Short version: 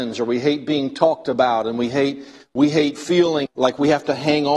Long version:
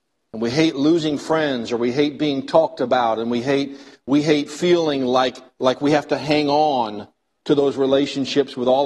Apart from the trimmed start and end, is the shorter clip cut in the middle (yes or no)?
yes